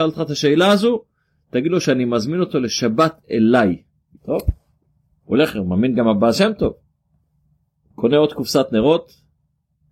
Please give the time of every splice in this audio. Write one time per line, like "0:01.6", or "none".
0:04.2